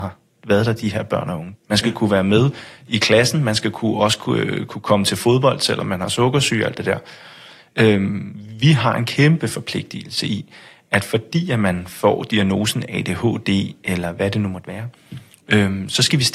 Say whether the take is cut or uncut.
cut